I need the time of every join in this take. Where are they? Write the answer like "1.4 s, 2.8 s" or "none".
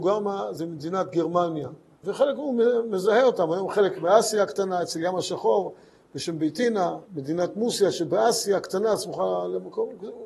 2.0 s, 7.1 s